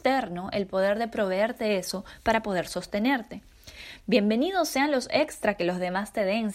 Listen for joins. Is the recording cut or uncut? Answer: uncut